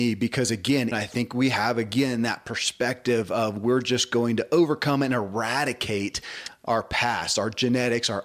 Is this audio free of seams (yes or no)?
no